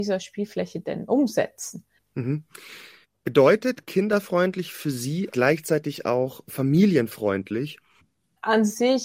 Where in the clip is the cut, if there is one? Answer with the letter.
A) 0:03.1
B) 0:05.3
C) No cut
B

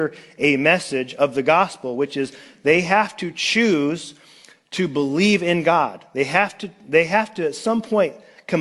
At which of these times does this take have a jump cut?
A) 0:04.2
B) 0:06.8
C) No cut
C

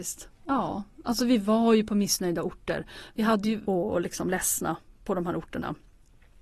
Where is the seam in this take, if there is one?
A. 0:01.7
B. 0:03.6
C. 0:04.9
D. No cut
B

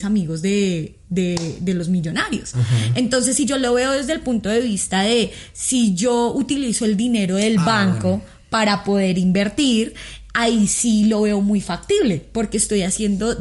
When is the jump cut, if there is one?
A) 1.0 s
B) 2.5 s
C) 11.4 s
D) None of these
D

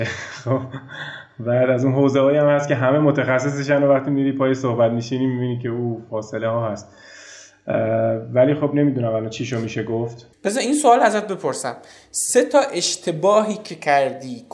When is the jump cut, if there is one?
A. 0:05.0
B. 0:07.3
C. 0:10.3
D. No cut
C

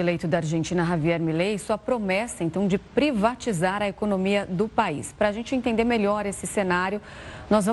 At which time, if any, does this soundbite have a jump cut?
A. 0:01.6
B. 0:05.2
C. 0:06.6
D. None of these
D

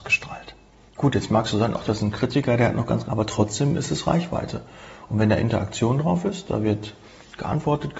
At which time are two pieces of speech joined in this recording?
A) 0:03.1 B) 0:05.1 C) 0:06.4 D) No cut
A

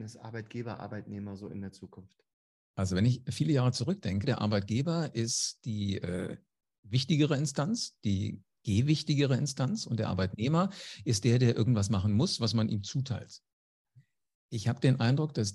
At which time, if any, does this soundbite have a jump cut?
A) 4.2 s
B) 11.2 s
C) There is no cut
A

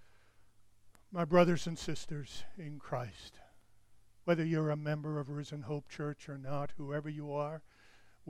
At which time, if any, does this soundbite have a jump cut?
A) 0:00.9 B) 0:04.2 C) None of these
C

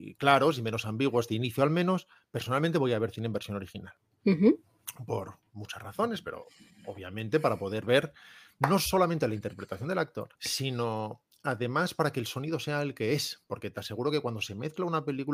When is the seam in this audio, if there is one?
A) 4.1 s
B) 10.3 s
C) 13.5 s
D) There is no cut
B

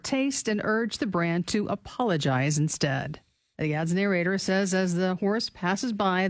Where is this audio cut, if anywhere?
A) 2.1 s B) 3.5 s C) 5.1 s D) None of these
B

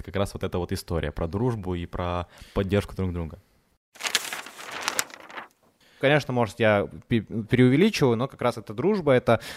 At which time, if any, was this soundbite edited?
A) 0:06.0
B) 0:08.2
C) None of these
A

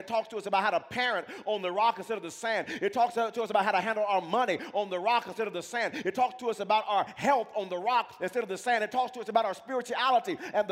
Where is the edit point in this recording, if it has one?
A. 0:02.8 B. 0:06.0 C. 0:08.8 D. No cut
D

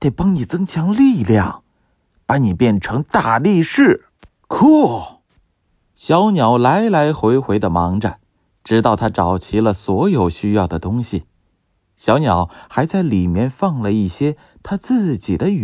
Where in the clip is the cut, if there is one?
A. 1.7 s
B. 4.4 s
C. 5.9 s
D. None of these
B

